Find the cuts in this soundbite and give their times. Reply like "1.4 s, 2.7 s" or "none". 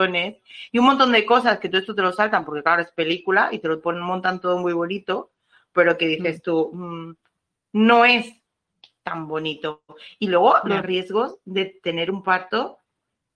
none